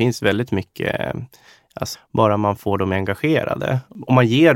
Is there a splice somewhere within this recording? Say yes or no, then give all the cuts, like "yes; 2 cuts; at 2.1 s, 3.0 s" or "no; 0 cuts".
yes; 1 cut; at 1.9 s